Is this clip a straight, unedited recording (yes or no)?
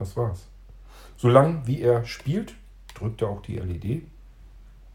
yes